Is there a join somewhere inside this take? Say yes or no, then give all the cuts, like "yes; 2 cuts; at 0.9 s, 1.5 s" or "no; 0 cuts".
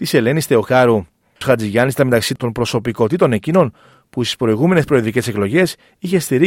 yes; 1 cut; at 1.4 s